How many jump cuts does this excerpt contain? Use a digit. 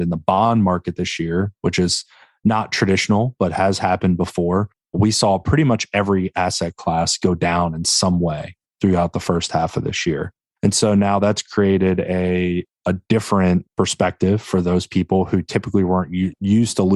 0